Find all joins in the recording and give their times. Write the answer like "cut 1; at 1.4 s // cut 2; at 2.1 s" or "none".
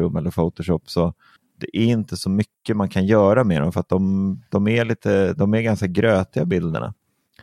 none

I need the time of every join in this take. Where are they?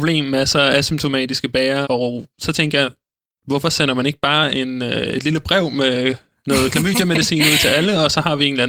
cut 1; at 1.8 s

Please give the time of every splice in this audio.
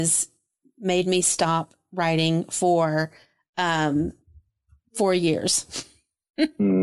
none

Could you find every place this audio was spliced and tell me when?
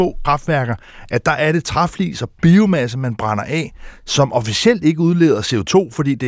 none

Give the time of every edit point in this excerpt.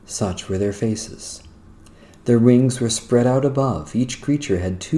none

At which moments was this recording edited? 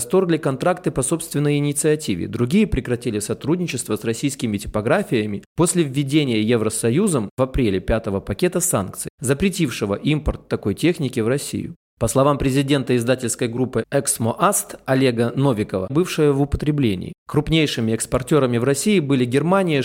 cut 1; at 15.9 s // cut 2; at 17.2 s

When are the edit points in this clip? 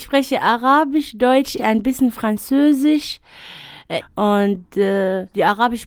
cut 1; at 1.6 s // cut 2; at 4.0 s

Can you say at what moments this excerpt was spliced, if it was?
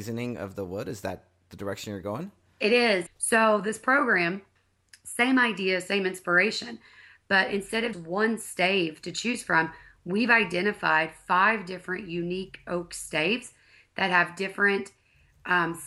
cut 1; at 3.1 s // cut 2; at 7.9 s

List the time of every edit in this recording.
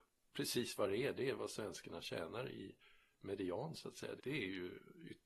cut 1; at 4.2 s

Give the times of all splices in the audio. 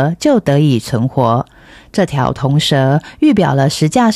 none

